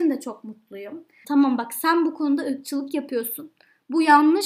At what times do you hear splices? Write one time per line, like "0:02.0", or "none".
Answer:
0:01.2